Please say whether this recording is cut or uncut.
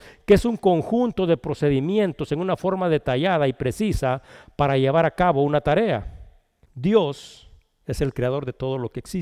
cut